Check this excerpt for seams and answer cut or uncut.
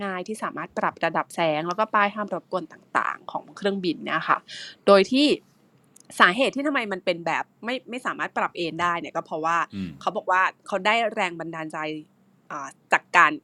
cut